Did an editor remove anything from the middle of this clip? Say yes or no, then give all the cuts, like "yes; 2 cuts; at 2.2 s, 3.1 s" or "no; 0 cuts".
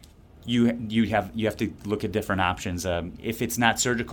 no; 0 cuts